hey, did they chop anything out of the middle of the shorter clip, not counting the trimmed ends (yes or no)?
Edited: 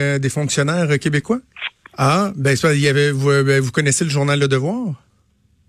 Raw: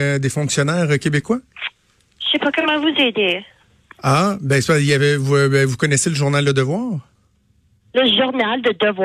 yes